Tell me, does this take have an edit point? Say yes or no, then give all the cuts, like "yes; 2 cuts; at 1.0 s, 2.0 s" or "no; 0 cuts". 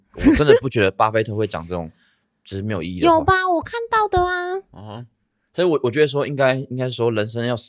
no; 0 cuts